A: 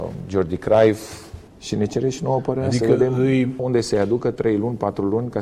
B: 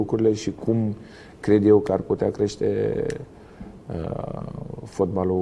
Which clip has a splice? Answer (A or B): A